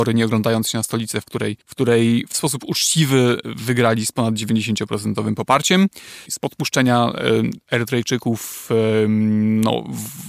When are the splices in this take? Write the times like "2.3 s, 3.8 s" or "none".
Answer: 1.6 s, 6.3 s